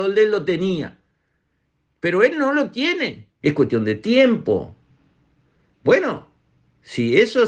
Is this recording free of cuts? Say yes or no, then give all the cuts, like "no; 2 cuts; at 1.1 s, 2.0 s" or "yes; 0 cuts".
no; 1 cut; at 3.4 s